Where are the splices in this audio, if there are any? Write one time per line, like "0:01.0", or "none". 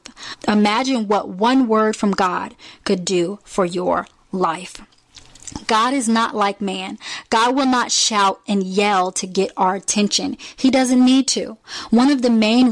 none